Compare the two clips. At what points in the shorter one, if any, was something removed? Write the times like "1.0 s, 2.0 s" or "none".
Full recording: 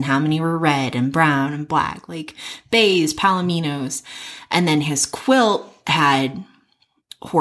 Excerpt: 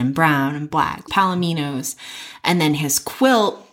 1.1 s